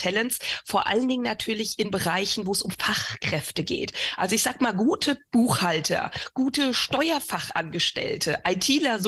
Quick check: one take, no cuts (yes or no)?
no